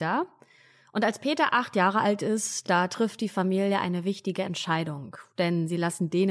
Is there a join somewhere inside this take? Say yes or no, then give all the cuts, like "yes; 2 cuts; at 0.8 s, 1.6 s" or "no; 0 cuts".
no; 0 cuts